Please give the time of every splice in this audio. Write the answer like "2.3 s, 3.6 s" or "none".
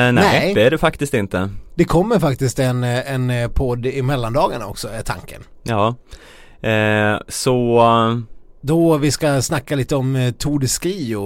none